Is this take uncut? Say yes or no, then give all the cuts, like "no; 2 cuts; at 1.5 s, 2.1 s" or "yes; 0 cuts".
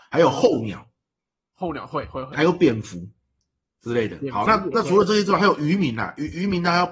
yes; 0 cuts